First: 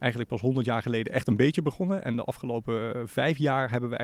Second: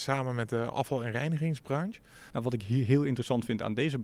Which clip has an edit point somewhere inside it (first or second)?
second